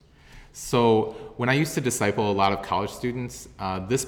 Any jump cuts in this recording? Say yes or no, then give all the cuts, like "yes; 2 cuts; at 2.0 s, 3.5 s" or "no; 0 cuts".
no; 0 cuts